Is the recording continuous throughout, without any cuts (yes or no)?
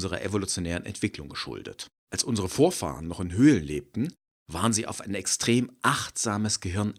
no